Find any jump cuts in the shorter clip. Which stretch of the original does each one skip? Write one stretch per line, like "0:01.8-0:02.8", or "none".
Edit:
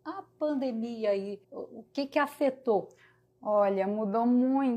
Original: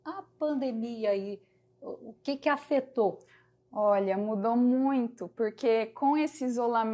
0:01.4-0:01.7